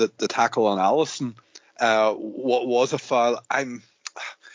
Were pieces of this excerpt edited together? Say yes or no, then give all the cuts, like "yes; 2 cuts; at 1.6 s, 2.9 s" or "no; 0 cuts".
no; 0 cuts